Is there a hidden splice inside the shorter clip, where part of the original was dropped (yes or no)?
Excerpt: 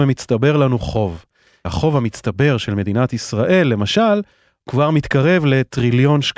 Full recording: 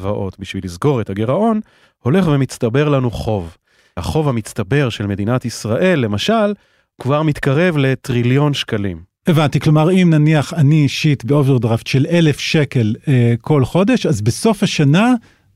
no